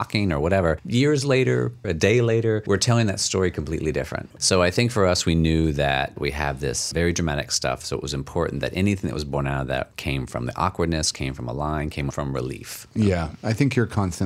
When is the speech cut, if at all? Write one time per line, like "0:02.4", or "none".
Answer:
0:01.8